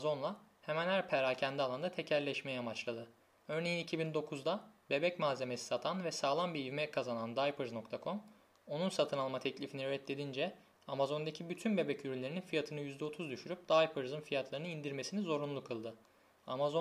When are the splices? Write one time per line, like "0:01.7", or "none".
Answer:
0:03.4